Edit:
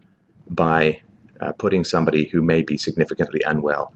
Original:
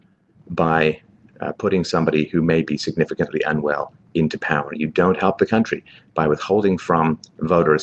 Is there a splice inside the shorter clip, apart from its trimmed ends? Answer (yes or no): no